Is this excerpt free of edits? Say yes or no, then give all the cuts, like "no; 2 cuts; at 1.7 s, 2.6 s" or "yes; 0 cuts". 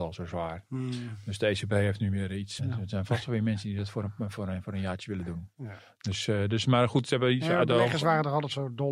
no; 1 cut; at 2.6 s